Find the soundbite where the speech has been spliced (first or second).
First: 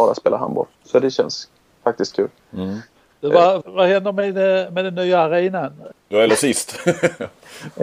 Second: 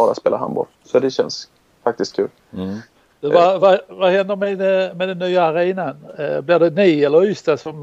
first